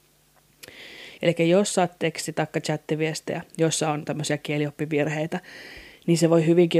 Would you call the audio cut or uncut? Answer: cut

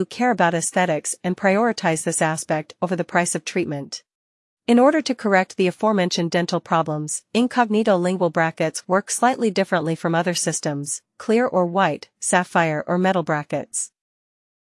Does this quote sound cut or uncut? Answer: cut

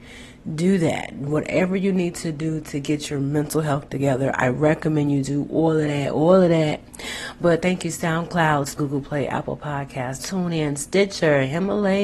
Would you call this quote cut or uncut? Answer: cut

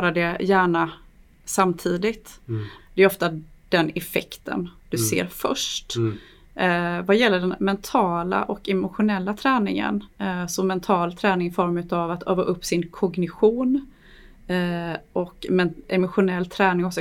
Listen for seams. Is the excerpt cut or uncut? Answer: cut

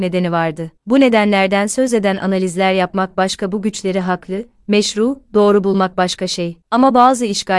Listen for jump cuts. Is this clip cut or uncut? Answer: uncut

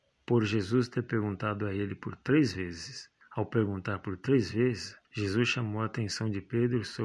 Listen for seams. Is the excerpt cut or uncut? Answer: cut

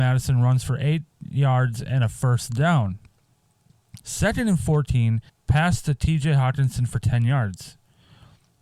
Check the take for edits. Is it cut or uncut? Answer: cut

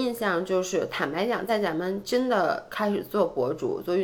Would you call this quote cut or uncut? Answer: uncut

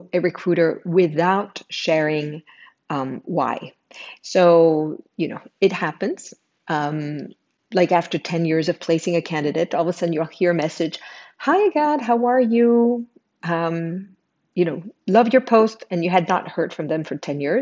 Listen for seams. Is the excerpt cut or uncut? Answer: uncut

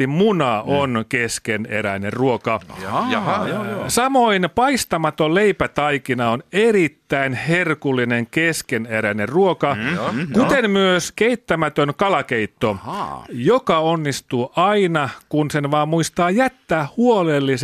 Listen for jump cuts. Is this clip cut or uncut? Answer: uncut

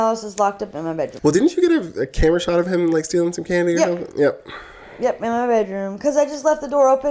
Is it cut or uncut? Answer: cut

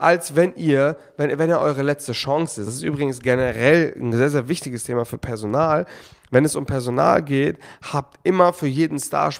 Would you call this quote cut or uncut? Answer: uncut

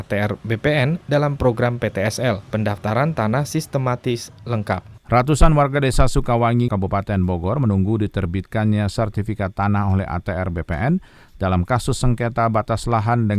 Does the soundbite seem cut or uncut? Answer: cut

